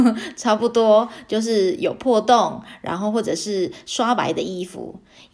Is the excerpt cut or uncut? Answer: uncut